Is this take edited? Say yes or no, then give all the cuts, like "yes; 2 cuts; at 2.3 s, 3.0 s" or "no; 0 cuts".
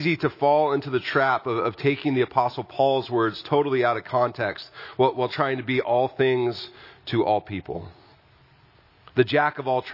no; 0 cuts